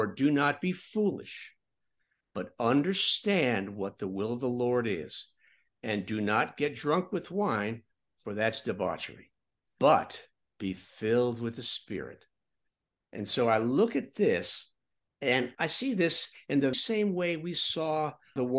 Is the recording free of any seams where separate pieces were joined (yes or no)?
no